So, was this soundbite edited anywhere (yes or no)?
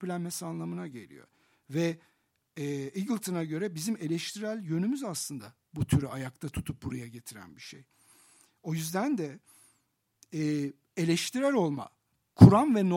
no